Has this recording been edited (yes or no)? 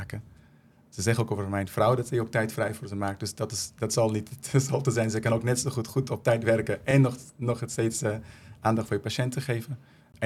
no